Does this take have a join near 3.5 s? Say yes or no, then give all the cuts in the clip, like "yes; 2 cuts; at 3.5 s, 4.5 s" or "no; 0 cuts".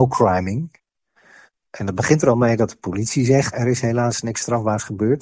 yes; 1 cut; at 3.5 s